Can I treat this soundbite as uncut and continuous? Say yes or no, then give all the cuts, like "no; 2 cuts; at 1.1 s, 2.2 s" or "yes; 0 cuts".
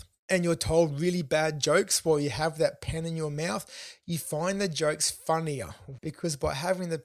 no; 1 cut; at 6.0 s